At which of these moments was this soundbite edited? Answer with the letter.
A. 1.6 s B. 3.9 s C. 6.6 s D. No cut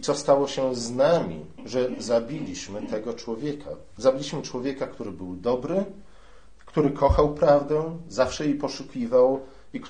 A